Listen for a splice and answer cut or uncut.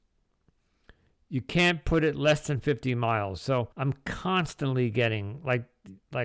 cut